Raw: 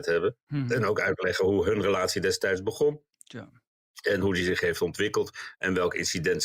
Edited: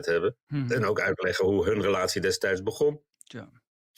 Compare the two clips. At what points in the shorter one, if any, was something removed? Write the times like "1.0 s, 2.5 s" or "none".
none